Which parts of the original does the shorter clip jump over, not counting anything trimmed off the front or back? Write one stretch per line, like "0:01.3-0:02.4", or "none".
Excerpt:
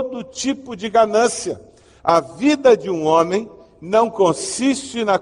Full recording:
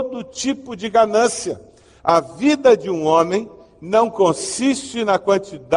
none